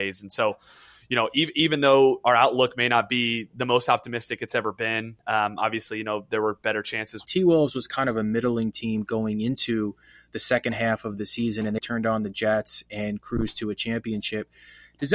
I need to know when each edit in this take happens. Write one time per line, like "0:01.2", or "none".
0:07.3
0:11.8

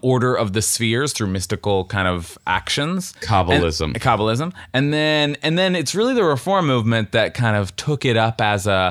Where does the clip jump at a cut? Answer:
none

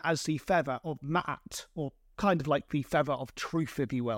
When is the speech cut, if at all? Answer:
none

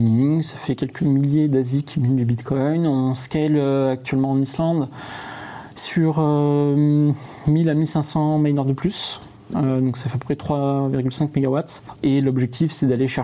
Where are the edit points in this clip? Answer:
0:12.0

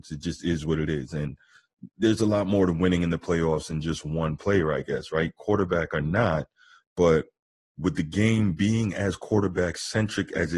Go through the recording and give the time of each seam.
none

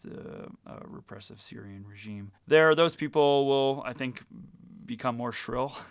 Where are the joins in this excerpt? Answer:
0:02.4

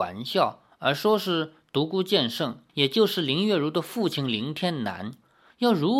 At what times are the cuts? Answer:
0:02.7

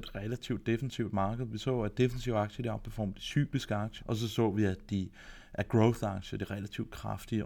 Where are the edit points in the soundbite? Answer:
0:04.0

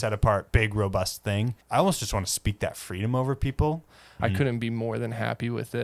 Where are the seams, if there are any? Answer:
0:01.6
0:04.2

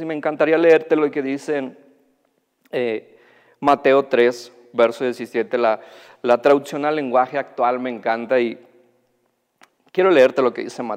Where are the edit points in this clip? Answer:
none

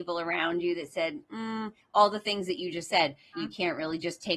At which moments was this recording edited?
0:03.3

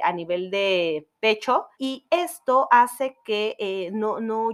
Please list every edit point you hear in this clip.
0:01.7

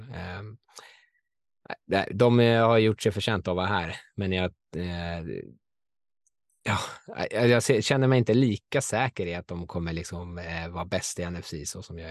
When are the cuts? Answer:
none

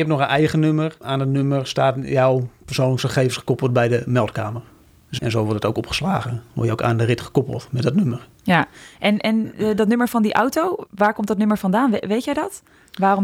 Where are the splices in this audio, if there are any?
0:05.2

